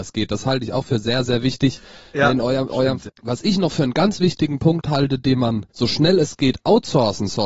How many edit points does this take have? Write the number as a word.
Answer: two